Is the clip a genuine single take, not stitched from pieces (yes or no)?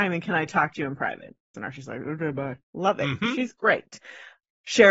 no